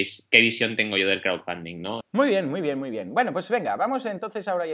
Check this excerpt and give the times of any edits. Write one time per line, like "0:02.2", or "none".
0:02.0